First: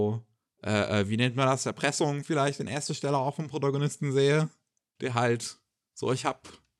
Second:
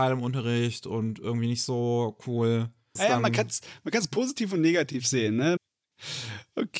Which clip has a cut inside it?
second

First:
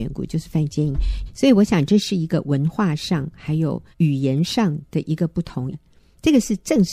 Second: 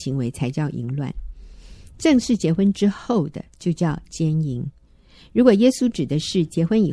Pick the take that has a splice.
first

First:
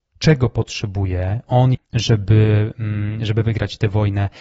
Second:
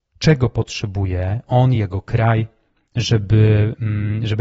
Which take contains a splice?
first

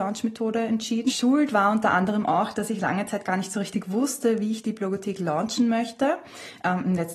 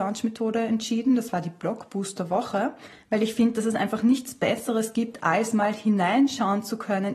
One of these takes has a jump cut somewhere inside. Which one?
first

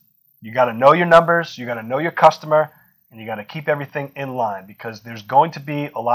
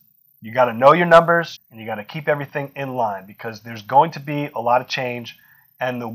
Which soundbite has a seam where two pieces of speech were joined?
second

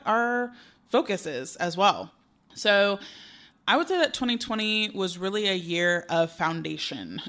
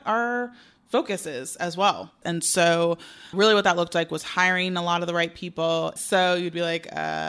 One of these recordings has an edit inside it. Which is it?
second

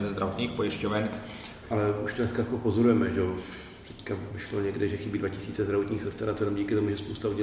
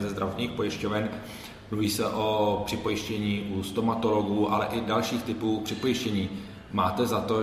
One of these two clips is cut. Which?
first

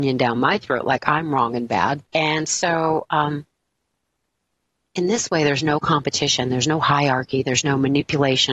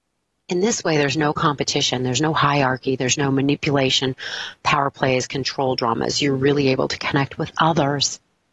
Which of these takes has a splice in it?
first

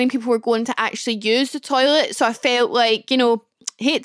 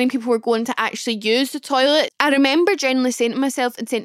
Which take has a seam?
second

